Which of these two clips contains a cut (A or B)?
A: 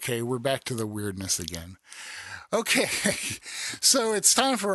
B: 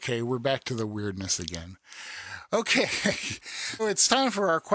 B